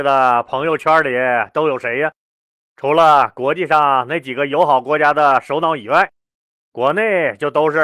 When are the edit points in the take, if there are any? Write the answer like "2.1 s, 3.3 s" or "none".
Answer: none